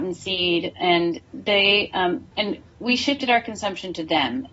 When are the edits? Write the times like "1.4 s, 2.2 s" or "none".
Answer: 2.3 s